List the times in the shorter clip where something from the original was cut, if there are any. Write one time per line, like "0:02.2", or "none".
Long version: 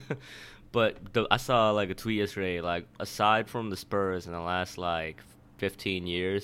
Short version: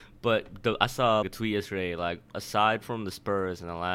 0:01.2